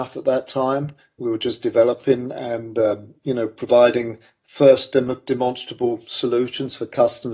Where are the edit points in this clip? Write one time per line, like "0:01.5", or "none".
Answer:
none